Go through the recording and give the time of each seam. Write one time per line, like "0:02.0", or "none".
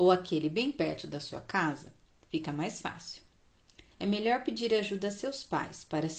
0:03.9